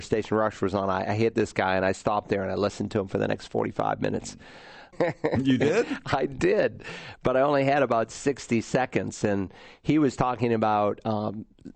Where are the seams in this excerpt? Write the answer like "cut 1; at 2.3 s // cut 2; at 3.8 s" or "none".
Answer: cut 1; at 4.9 s